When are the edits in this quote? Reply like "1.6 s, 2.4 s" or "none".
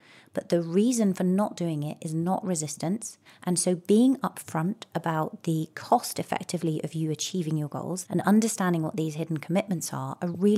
3.3 s, 8.0 s